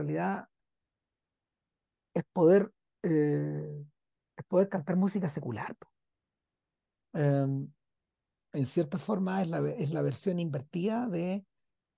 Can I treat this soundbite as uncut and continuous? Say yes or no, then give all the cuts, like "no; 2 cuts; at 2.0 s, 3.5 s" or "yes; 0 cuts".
no; 1 cut; at 7.0 s